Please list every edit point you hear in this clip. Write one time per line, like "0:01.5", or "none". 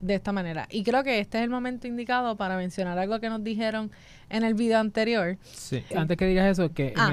0:05.9